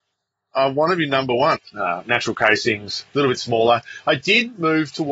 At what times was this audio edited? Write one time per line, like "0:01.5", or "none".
0:01.6